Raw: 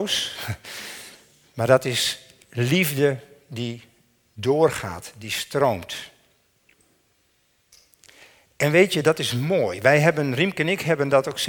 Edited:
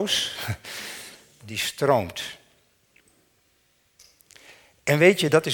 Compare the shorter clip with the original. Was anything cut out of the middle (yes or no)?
yes